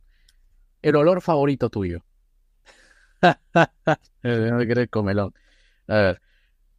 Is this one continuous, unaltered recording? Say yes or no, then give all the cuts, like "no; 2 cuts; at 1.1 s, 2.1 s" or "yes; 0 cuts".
no; 1 cut; at 2.6 s